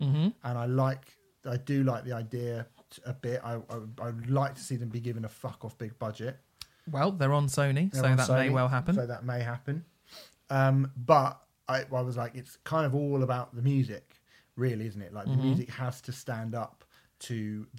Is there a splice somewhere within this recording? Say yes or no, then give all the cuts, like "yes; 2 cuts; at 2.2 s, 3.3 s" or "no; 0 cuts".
no; 0 cuts